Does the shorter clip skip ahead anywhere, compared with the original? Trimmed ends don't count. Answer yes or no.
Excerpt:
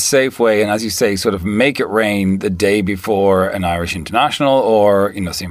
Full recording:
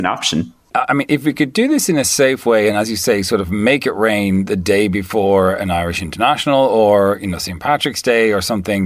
no